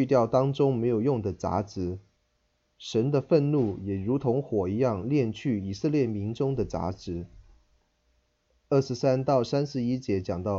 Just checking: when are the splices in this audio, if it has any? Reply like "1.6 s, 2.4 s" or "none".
none